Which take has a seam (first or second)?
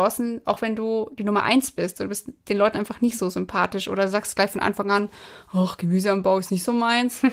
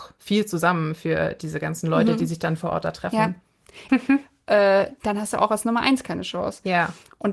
second